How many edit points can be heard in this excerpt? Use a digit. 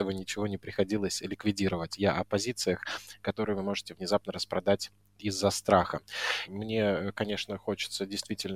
1